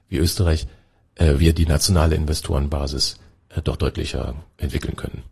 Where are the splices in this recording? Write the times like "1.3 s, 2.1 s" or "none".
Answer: none